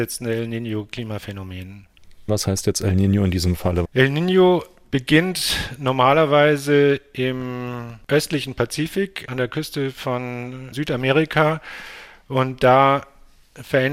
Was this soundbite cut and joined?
yes; 2 cuts; at 2.3 s, 3.8 s

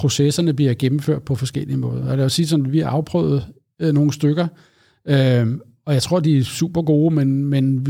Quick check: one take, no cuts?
yes; 0 cuts

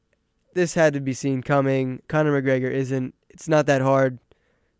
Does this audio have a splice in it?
yes; 1 cut; at 2.0 s

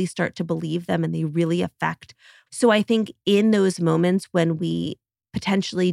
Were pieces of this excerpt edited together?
yes; 1 cut; at 2.5 s

